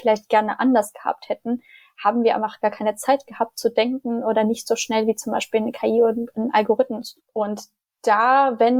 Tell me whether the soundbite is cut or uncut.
uncut